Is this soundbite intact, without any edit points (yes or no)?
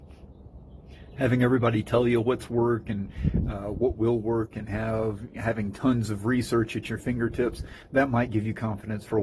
yes